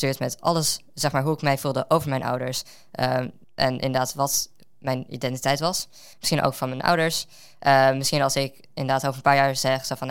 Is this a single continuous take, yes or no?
no